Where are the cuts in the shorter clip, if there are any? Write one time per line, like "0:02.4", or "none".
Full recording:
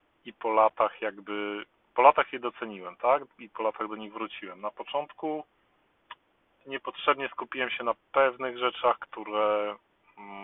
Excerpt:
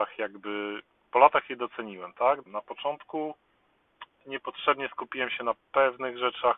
0:02.5
0:04.1

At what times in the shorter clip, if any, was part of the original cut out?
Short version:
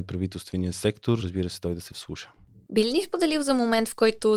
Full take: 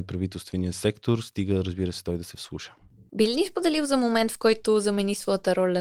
0:01.2

